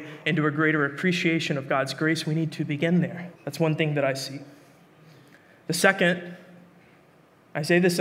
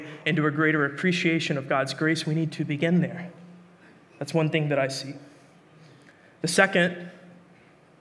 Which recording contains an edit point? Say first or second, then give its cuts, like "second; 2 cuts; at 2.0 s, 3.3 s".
first; 1 cut; at 3.4 s